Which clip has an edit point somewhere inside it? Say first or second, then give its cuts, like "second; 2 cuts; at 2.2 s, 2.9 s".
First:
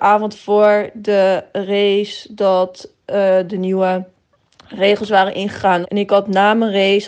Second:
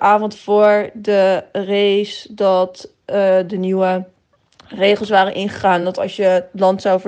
first; 1 cut; at 5.8 s